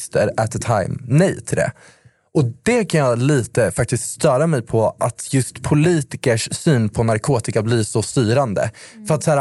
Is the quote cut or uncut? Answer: uncut